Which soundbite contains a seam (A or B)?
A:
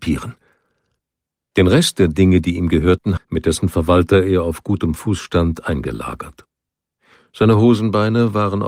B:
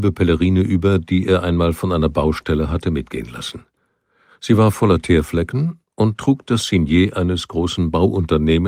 A